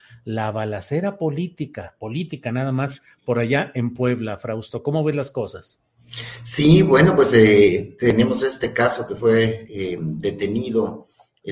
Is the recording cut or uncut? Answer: uncut